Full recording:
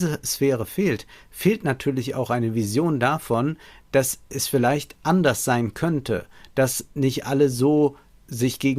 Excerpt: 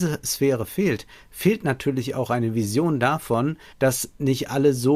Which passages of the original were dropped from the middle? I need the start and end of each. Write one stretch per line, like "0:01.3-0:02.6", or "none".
0:03.7-0:06.5